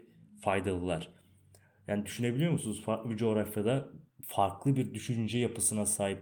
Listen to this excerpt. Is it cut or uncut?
cut